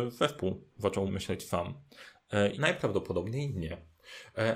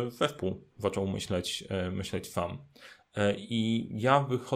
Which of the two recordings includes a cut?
first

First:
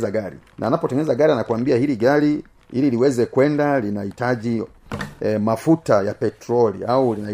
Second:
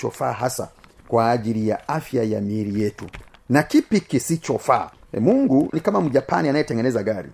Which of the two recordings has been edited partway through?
second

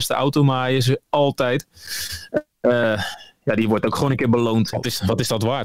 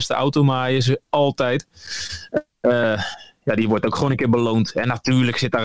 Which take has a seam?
first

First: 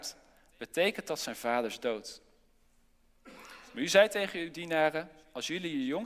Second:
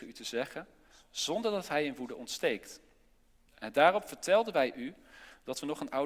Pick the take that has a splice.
second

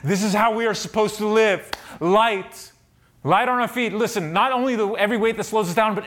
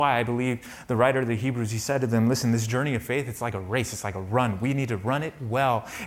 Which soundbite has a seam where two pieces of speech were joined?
first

